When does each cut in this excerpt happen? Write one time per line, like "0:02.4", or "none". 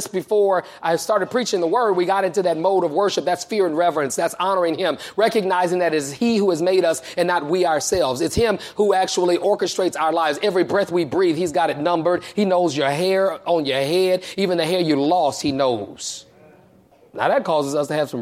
none